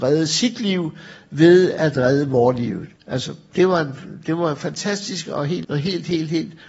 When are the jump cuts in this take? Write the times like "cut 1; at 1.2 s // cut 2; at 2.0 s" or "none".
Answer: cut 1; at 3.0 s // cut 2; at 5.6 s